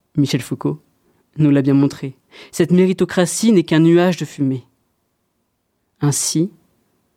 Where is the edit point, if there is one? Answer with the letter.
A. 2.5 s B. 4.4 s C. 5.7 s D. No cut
D